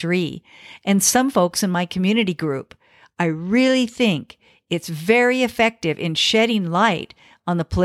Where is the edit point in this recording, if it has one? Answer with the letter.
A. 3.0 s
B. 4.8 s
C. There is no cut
C